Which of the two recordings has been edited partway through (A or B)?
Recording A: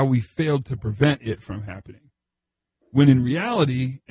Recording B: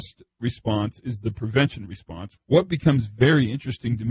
B